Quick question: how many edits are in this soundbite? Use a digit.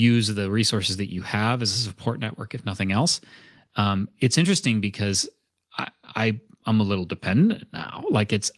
0